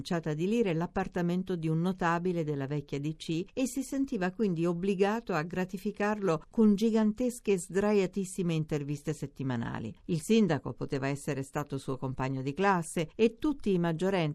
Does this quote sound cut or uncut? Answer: cut